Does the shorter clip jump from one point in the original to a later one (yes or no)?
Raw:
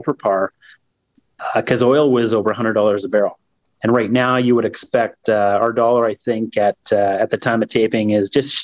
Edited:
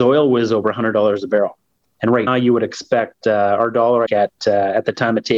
yes